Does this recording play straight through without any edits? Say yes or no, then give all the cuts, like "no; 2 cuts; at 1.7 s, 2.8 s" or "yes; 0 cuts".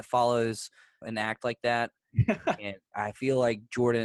no; 2 cuts; at 1.0 s, 2.9 s